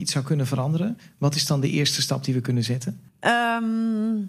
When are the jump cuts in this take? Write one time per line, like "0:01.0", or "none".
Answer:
0:03.1